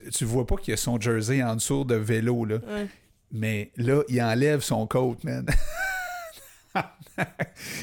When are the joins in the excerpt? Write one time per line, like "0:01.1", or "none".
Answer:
none